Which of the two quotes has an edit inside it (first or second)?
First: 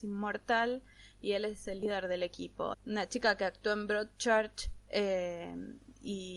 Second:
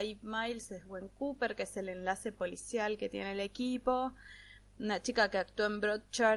first